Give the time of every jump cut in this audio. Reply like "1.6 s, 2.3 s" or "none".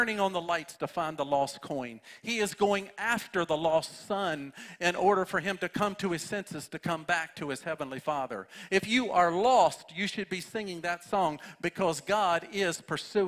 none